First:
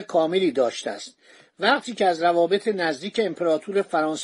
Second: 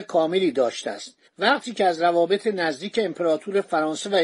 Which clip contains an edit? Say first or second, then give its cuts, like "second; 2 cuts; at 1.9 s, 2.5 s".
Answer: second; 1 cut; at 1.3 s